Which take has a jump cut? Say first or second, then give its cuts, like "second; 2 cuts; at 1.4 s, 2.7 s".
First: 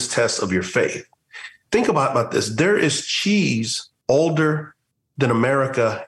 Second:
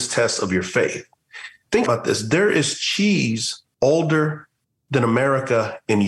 second; 1 cut; at 1.9 s